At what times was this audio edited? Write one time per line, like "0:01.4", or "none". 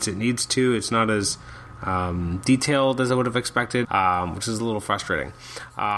0:03.8